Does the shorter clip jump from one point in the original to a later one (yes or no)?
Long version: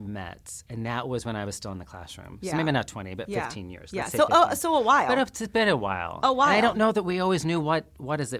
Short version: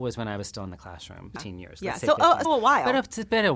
yes